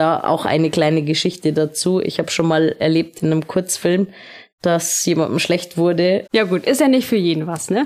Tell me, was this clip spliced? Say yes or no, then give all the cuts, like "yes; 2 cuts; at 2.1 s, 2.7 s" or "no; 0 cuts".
yes; 1 cut; at 6.3 s